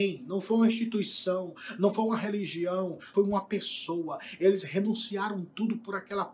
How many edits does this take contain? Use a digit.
1